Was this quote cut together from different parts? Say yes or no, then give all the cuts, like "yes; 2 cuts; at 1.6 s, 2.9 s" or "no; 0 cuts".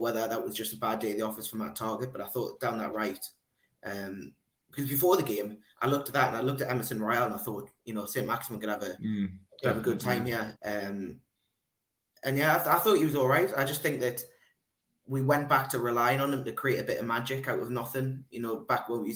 yes; 2 cuts; at 7.8 s, 10.5 s